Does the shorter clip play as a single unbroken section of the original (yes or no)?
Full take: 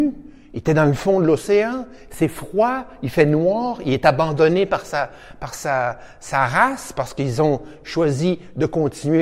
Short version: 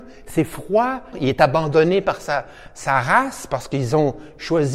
no